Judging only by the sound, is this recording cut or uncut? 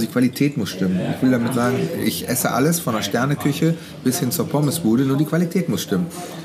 uncut